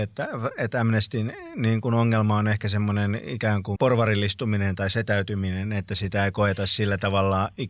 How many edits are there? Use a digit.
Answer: 1